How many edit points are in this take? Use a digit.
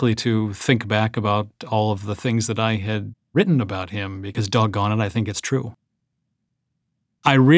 0